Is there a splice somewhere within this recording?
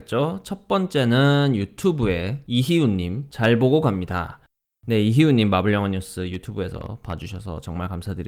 no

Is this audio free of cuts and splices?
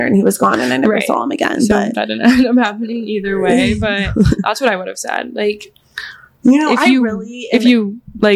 yes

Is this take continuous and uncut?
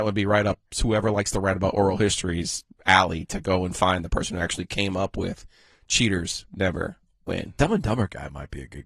yes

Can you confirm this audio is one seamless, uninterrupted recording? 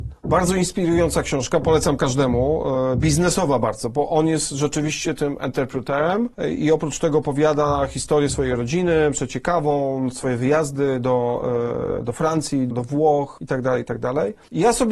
no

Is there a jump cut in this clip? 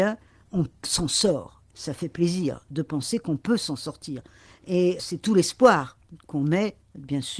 yes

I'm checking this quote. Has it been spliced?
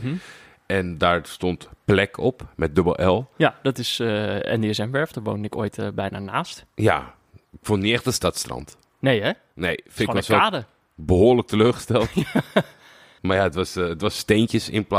yes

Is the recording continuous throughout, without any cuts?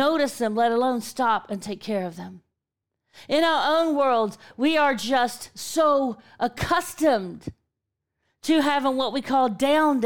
yes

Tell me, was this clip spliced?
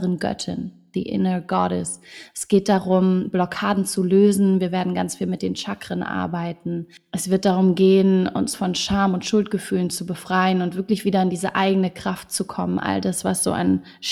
no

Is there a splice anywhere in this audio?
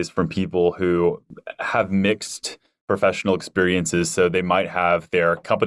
no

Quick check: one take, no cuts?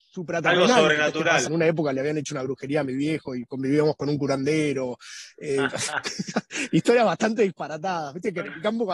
no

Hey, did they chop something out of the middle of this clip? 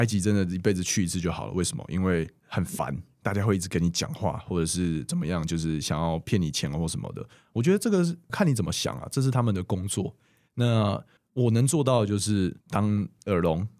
no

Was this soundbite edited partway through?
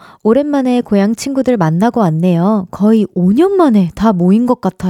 no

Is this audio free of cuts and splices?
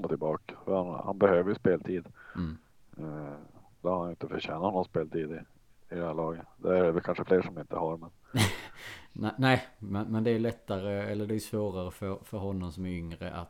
no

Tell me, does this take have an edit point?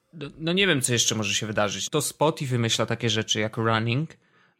yes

